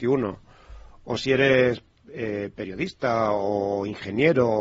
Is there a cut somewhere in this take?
no; 0 cuts

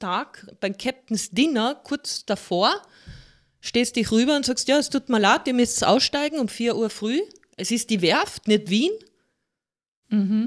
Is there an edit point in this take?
no; 0 cuts

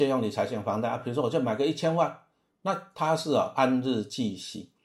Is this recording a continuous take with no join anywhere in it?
yes; 0 cuts

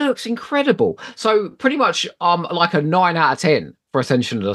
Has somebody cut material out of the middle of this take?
no; 0 cuts

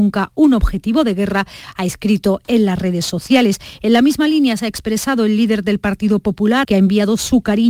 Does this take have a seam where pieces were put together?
yes; 1 cut; at 6.6 s

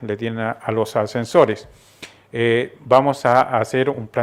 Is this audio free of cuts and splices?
yes; 0 cuts

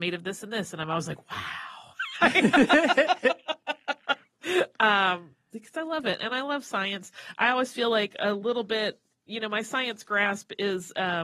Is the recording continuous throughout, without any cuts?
yes; 0 cuts

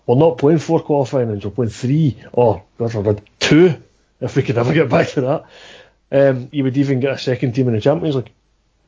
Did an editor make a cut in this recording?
yes; 2 cuts; at 2.7 s, 6.5 s

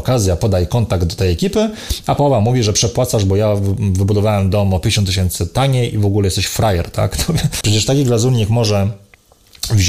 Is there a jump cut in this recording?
yes; 1 cut; at 7.6 s

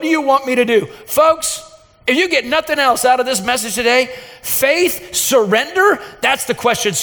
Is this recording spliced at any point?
no; 0 cuts

